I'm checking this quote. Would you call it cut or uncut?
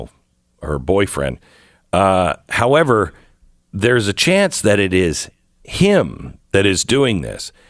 uncut